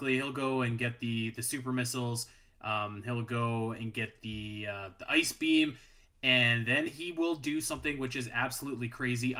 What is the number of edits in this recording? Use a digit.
0